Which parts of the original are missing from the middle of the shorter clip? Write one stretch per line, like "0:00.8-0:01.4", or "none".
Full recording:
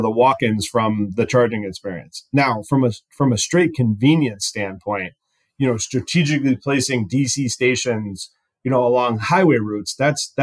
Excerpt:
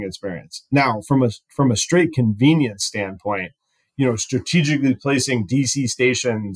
none